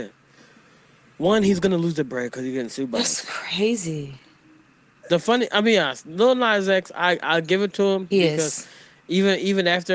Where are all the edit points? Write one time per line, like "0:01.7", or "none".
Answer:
0:08.1

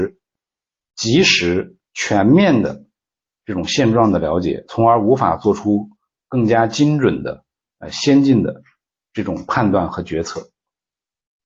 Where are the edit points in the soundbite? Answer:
0:01.8

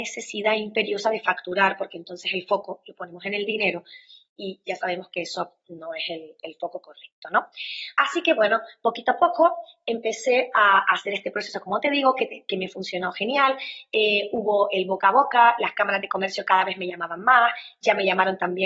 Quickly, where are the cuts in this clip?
none

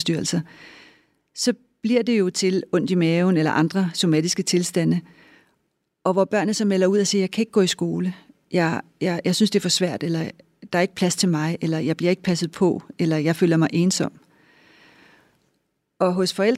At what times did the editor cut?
none

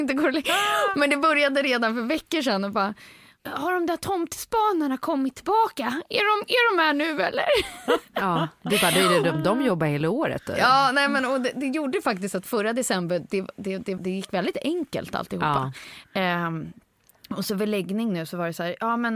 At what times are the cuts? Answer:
0:14.0

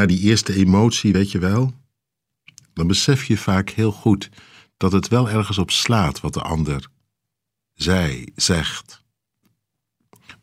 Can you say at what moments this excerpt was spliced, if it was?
none

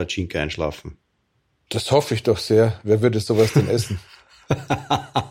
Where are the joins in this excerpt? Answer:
none

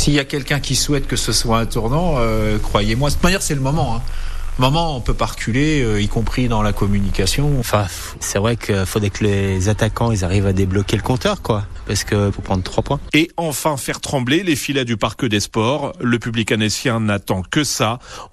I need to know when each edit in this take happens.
0:07.6
0:12.3

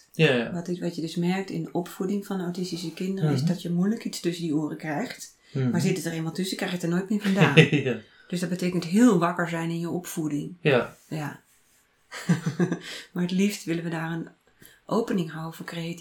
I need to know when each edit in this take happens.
none

